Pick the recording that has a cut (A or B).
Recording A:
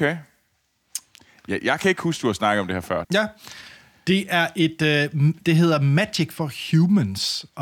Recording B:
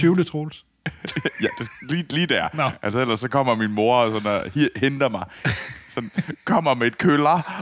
A